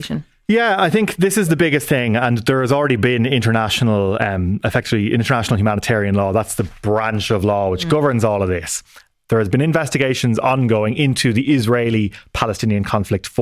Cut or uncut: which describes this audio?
uncut